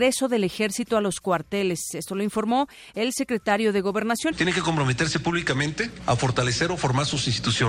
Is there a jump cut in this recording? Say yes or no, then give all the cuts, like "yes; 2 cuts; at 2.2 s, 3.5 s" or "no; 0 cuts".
yes; 1 cut; at 4.3 s